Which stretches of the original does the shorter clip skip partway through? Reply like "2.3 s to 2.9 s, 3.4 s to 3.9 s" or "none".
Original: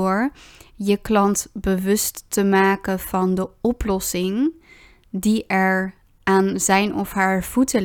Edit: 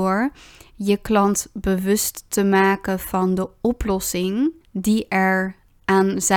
4.6 s to 5.0 s

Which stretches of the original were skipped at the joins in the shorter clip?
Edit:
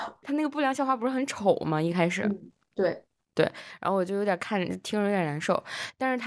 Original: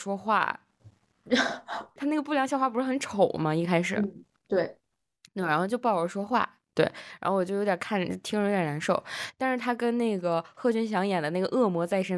5.0 s to 6.6 s

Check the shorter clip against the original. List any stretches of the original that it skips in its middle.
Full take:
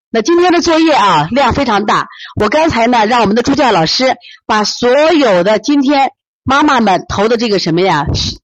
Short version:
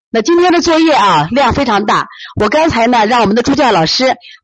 none

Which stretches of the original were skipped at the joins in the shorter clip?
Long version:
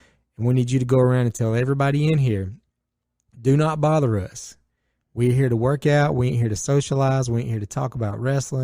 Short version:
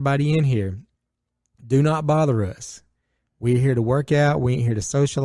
none

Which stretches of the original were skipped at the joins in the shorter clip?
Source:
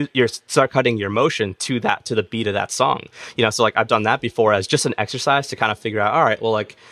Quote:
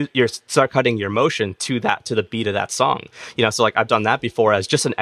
none

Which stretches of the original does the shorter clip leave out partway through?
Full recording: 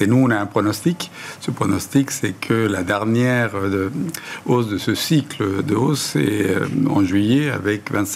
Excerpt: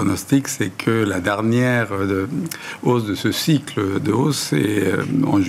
none

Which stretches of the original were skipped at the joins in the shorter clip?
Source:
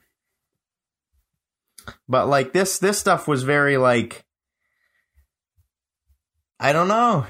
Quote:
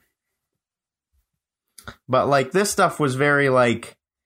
2.5 s to 2.8 s

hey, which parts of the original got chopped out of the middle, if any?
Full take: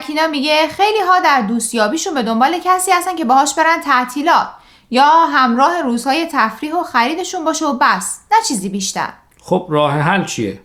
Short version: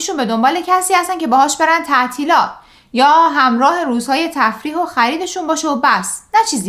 none

